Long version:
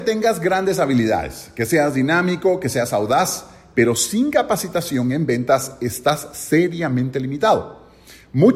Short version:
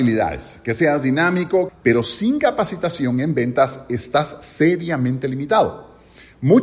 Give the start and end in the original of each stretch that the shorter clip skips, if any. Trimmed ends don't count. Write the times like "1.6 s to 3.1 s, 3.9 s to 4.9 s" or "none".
2.6 s to 3.6 s